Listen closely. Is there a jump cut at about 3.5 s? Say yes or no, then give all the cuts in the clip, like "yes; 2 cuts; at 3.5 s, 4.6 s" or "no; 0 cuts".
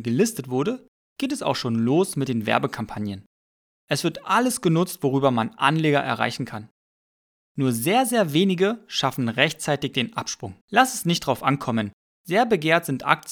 no; 3 cuts; at 7.4 s, 10.6 s, 12.1 s